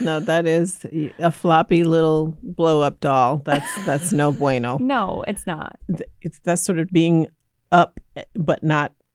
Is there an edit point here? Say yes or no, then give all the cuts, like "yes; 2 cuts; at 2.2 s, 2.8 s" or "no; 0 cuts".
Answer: yes; 2 cuts; at 5.8 s, 6.9 s